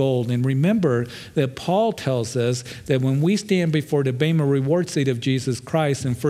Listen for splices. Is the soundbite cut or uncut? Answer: uncut